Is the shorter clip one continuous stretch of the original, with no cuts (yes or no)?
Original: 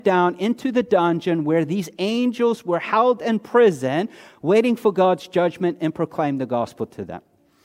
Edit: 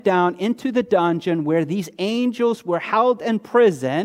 yes